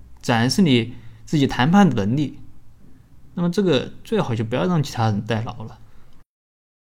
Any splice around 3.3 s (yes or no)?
no